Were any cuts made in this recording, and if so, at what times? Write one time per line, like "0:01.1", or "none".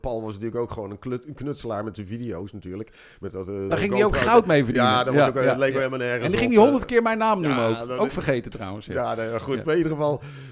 0:03.7